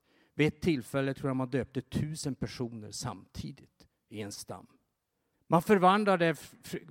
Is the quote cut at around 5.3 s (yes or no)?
yes